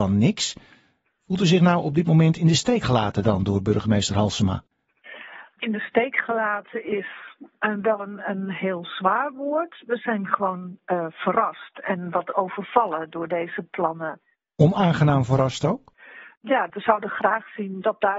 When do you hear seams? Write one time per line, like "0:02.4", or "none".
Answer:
none